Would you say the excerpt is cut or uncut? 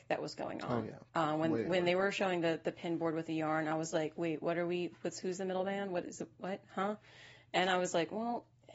cut